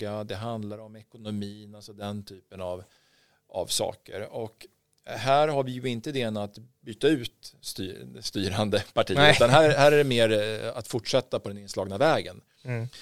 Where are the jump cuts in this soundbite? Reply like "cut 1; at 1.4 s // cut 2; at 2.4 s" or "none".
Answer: none